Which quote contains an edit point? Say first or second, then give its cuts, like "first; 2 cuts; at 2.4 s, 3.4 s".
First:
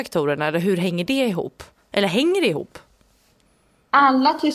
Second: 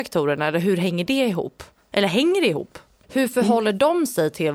second; 1 cut; at 3.0 s